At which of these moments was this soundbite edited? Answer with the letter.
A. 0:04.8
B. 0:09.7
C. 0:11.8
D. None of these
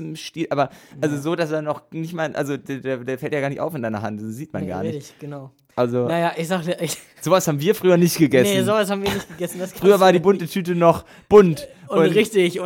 D